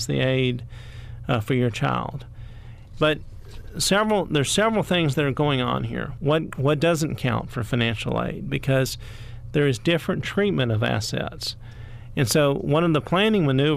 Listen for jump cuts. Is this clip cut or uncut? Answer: cut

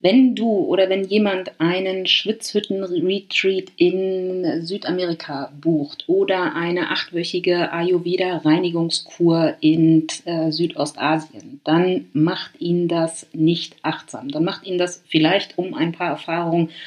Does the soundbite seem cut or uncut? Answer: uncut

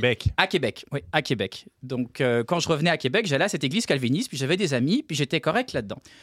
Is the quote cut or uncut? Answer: uncut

